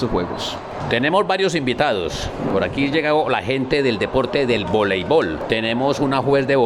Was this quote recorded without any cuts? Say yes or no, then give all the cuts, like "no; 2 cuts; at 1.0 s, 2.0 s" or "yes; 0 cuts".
yes; 0 cuts